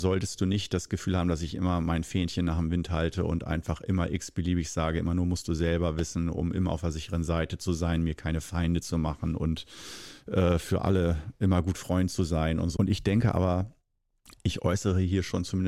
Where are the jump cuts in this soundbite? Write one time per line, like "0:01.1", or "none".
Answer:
0:12.8